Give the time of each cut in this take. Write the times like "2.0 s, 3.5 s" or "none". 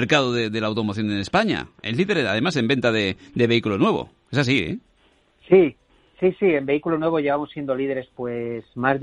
none